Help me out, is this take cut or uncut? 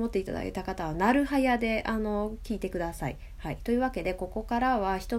uncut